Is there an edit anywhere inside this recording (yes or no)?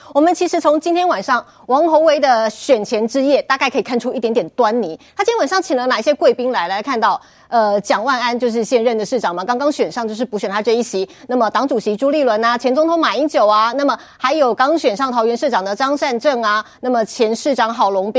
no